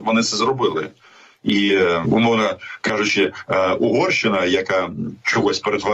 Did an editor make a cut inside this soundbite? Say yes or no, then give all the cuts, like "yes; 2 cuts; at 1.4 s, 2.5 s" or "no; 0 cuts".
yes; 1 cut; at 2.0 s